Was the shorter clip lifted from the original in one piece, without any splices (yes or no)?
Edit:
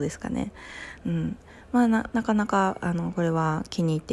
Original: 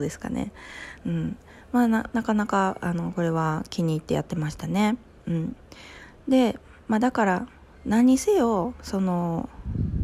yes